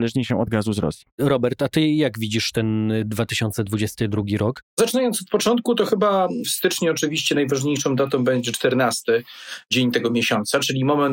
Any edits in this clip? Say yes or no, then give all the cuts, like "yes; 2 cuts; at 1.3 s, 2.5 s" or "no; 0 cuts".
yes; 2 cuts; at 1.1 s, 4.7 s